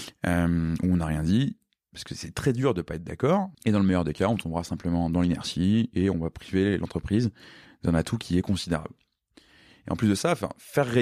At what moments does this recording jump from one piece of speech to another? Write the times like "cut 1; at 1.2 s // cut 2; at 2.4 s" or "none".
cut 1; at 3.5 s